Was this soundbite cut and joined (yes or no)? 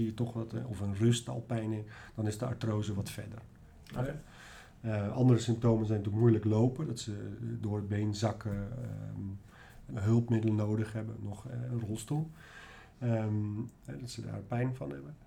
yes